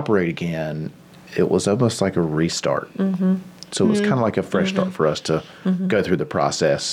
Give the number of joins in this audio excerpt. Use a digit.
1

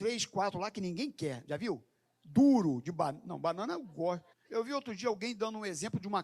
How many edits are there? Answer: 2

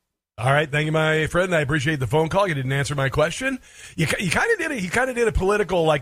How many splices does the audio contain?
0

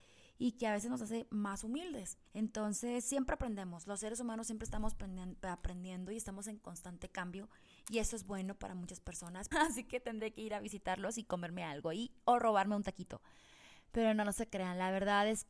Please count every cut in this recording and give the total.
2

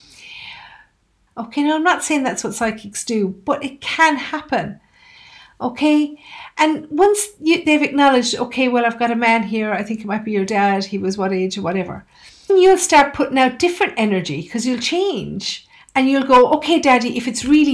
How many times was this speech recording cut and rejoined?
2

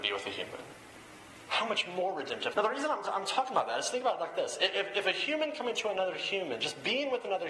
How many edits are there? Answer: 1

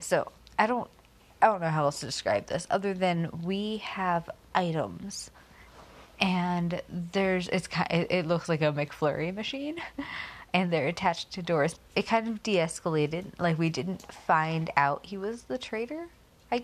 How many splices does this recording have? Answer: 1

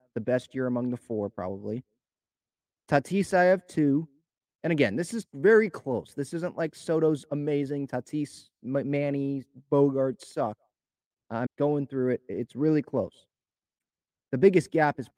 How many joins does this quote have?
1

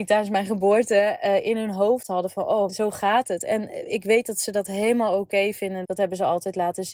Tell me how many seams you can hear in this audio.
2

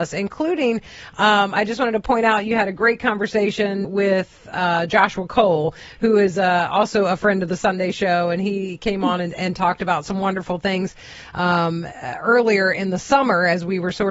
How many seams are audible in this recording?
1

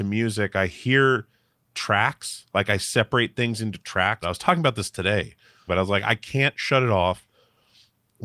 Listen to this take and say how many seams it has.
2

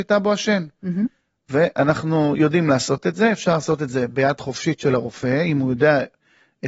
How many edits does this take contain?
0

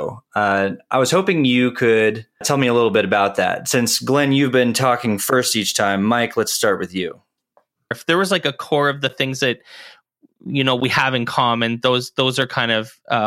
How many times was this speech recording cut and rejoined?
2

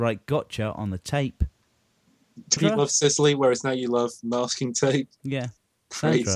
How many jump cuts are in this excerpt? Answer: 1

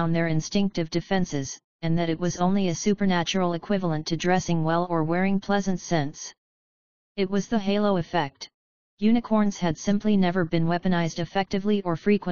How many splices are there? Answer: 2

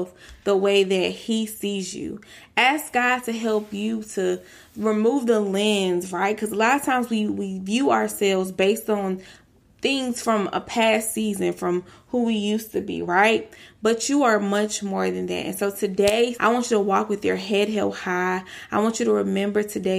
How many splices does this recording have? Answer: 1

